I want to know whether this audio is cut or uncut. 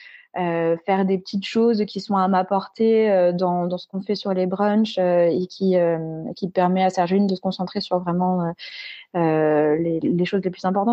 uncut